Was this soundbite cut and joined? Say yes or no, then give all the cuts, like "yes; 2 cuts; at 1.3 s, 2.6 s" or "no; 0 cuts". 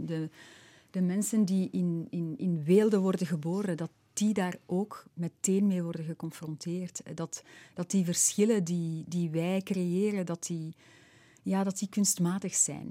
no; 0 cuts